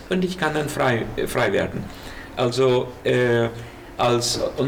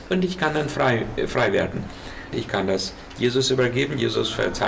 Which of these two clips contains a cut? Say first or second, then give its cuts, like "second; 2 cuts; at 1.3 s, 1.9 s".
second; 1 cut; at 2.3 s